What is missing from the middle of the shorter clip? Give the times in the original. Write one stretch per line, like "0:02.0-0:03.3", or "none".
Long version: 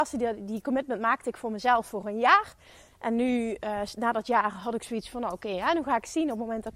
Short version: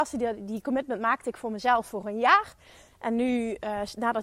none